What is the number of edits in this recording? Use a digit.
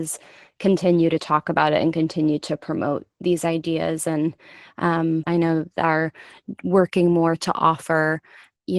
1